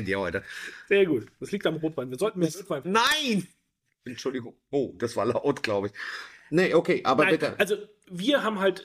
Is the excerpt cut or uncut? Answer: uncut